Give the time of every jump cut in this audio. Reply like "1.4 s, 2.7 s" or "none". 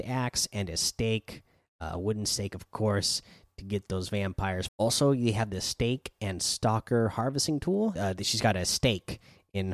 4.7 s, 8.0 s